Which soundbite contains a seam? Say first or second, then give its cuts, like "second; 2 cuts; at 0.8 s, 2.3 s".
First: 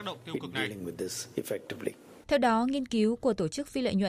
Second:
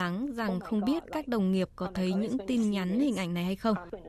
first; 1 cut; at 2.2 s